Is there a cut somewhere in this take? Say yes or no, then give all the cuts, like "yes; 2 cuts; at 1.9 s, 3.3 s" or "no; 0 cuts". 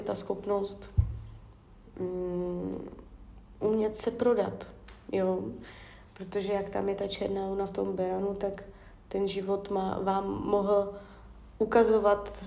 no; 0 cuts